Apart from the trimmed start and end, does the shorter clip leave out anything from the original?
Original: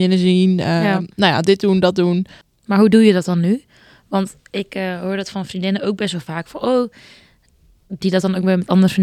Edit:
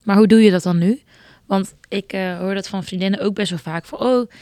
no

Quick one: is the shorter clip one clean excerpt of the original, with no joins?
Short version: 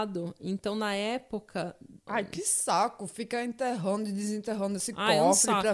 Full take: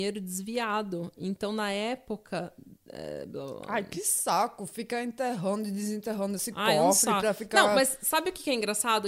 no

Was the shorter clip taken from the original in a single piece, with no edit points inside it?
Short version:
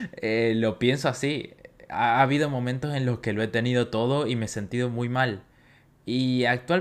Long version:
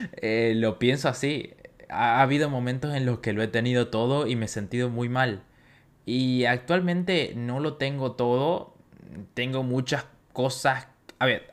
yes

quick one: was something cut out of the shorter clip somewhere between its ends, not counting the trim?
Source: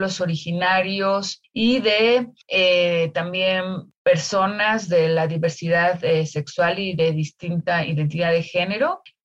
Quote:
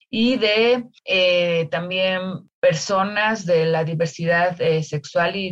no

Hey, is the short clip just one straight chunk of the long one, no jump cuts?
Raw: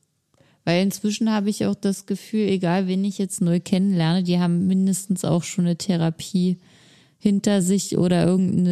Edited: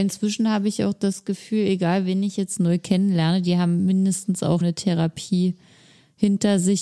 no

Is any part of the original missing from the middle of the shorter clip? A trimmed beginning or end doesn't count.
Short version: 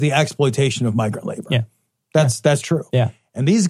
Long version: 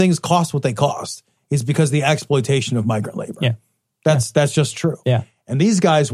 yes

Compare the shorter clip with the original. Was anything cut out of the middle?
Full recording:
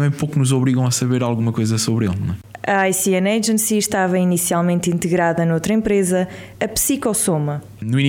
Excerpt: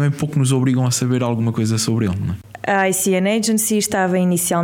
no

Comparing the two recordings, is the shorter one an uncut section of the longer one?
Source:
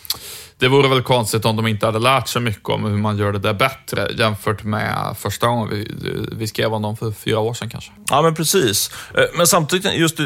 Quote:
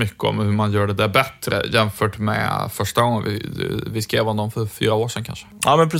yes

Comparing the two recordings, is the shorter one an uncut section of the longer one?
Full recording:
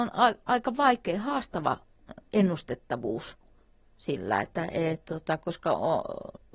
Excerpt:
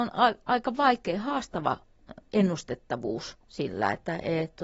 no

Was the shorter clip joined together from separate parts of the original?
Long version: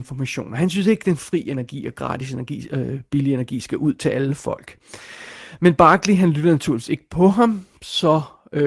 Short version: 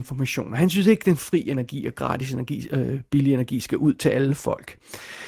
no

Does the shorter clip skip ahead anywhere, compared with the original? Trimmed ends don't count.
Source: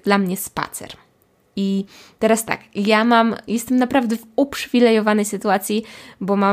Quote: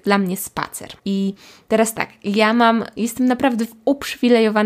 yes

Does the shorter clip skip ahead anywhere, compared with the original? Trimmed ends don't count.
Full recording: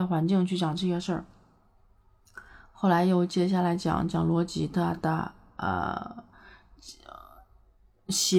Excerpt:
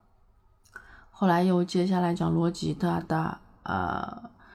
yes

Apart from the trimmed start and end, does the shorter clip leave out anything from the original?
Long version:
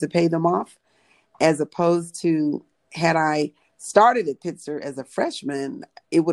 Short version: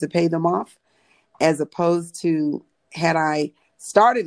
no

